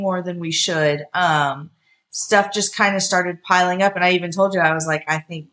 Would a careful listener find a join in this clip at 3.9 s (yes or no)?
no